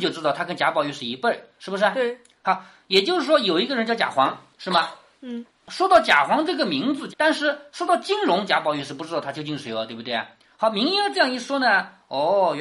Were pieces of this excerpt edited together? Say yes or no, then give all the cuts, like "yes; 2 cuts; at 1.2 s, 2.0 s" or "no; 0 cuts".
yes; 1 cut; at 7.1 s